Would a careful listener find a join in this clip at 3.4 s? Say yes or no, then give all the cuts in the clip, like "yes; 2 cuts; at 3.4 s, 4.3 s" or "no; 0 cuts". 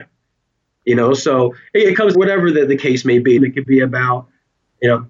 yes; 2 cuts; at 2.1 s, 3.4 s